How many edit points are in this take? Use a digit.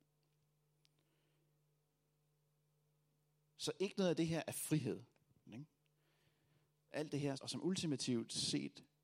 2